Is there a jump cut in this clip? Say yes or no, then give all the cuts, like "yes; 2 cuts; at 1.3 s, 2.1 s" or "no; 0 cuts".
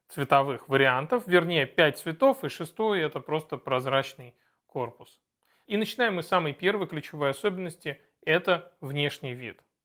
yes; 1 cut; at 5.6 s